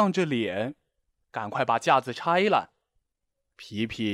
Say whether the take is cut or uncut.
cut